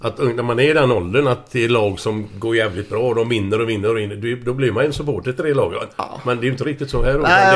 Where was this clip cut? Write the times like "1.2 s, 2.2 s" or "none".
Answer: 5.9 s